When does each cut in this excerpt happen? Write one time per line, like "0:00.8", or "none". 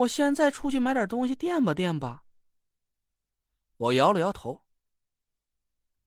none